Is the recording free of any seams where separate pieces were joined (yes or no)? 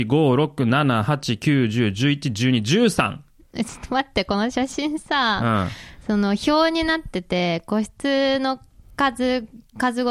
yes